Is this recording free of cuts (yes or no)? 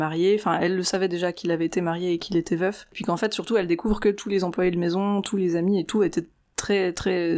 yes